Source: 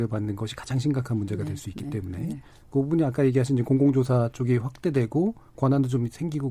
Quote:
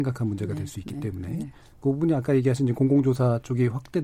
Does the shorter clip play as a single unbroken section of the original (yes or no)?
yes